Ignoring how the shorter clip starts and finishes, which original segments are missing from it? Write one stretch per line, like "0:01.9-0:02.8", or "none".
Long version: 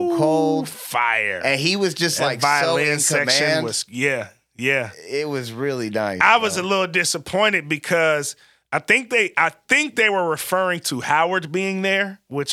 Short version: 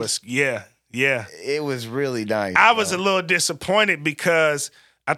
none